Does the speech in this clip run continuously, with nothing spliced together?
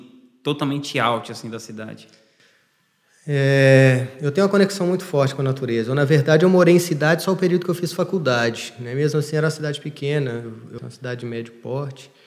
no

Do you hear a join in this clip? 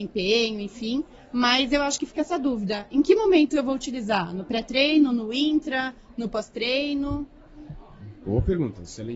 no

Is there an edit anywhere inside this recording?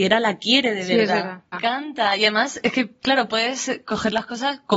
yes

